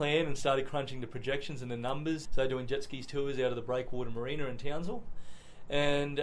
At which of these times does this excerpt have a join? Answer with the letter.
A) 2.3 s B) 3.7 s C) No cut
A